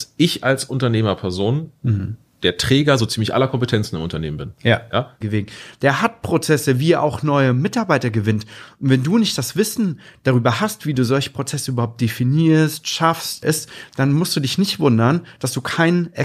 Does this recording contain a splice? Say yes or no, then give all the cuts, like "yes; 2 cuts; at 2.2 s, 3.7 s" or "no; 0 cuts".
yes; 2 cuts; at 5.2 s, 13.4 s